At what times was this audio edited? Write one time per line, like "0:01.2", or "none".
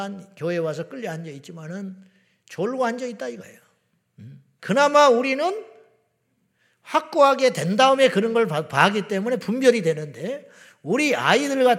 0:04.6